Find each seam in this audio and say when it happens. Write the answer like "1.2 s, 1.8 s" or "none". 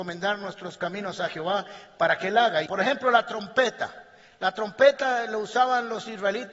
2.7 s